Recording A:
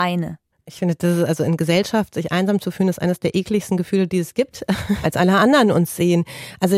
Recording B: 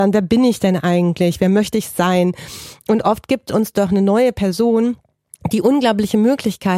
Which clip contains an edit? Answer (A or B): A